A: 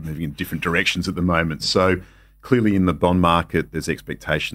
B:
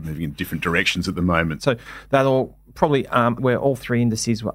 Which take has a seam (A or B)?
B